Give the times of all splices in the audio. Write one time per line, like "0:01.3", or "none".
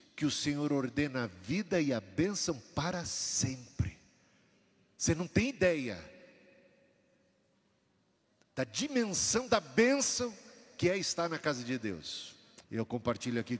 0:12.6